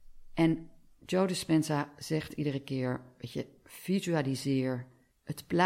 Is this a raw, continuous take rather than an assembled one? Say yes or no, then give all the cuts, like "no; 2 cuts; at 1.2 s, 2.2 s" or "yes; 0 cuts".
yes; 0 cuts